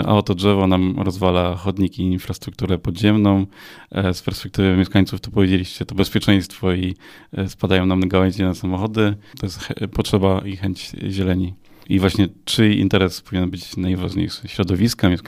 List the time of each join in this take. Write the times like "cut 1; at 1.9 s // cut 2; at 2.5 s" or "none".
cut 1; at 9.3 s // cut 2; at 11.8 s

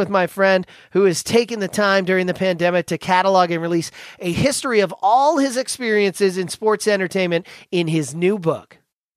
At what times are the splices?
none

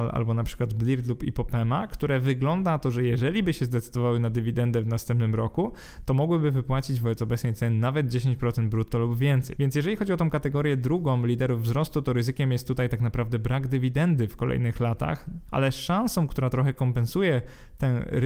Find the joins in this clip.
cut 1; at 9.6 s // cut 2; at 15.5 s

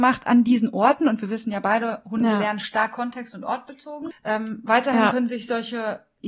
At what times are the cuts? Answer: cut 1; at 4.1 s

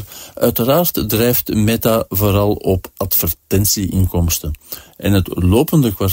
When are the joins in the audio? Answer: cut 1; at 4.9 s

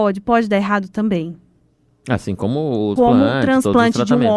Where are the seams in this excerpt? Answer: cut 1; at 3.0 s

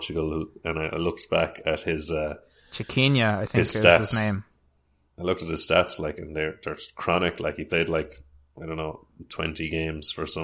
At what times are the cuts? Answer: none

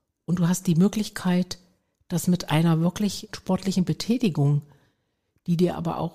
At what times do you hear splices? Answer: cut 1; at 3.3 s

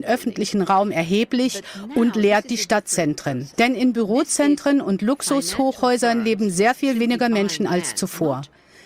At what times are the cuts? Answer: cut 1; at 3.5 s

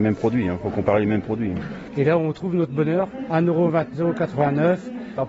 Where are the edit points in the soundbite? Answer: cut 1; at 3.9 s

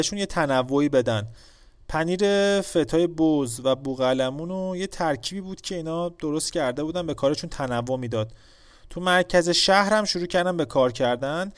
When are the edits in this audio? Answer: none

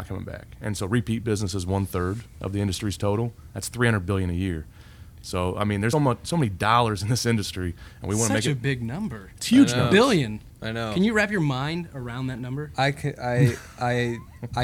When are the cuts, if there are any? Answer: cut 1; at 5.9 s

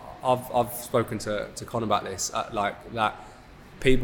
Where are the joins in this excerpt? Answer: none

